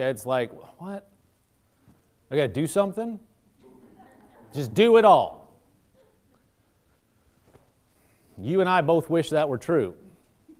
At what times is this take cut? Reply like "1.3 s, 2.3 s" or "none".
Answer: 4.3 s